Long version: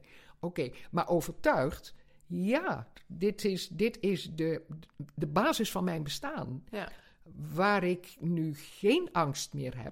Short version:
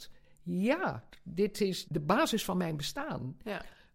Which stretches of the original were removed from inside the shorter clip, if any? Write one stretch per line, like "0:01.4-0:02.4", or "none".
0:03.7-0:05.1